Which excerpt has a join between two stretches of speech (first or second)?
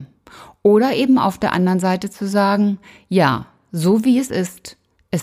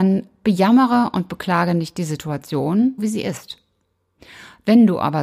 second